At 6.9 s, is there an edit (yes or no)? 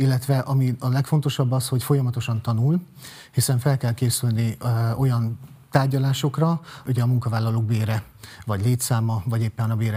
yes